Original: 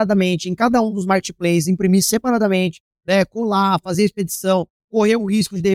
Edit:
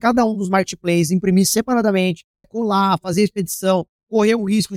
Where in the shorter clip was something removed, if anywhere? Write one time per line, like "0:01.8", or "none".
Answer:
0:02.4

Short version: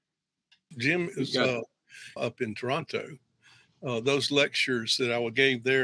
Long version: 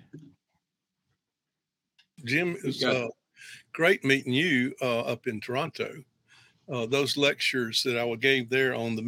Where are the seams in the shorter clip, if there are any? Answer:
0:02.2

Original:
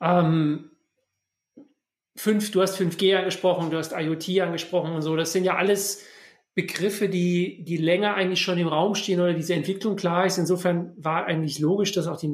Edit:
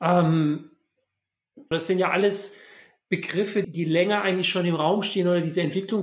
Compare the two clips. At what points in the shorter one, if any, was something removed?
0:01.7
0:03.6

